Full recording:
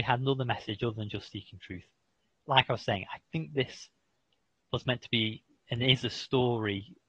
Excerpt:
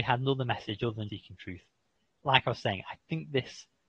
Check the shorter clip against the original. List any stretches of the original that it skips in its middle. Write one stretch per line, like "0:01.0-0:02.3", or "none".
0:01.1-0:01.3